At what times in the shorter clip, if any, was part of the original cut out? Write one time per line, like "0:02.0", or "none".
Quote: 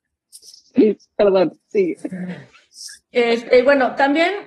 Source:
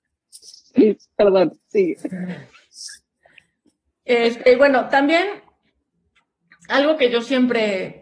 0:03.0